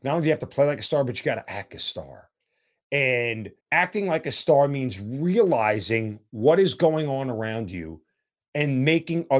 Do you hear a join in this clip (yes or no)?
yes